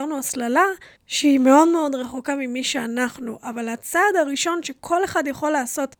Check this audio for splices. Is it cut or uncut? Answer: cut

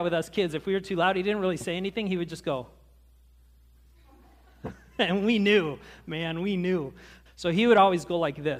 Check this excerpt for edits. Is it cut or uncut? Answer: cut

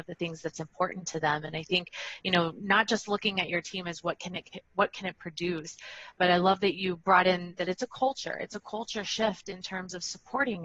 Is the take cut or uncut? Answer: uncut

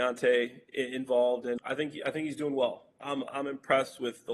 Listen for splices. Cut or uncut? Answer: cut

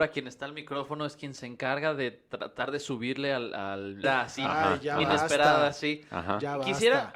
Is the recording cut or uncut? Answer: cut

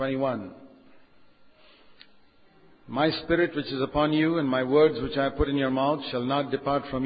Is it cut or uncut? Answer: uncut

